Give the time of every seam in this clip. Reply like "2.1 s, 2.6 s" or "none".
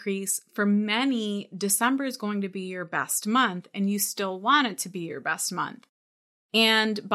none